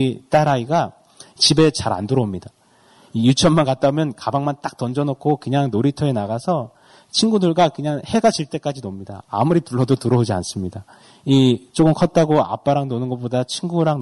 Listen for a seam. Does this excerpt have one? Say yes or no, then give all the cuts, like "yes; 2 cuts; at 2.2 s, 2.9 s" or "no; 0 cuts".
no; 0 cuts